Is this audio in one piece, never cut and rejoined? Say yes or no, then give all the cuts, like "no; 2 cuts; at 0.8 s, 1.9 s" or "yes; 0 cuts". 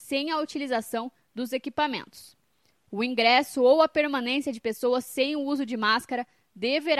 yes; 0 cuts